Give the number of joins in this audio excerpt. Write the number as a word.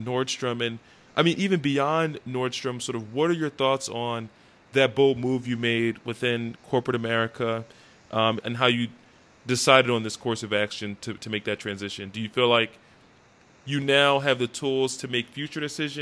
one